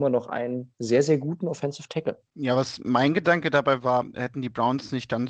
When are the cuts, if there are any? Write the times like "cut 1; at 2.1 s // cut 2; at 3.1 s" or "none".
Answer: cut 1; at 2.3 s // cut 2; at 4.1 s